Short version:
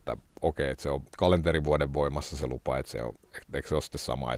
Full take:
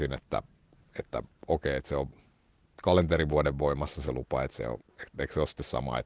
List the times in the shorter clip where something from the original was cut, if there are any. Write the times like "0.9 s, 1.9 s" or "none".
1.1 s